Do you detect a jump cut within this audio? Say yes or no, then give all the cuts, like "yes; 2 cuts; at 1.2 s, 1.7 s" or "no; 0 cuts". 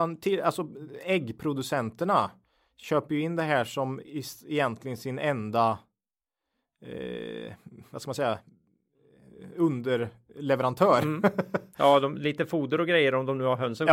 no; 0 cuts